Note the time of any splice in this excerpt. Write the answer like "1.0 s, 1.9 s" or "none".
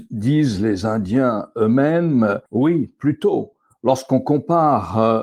2.5 s